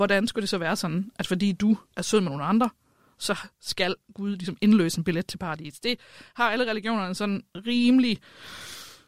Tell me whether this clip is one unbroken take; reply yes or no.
yes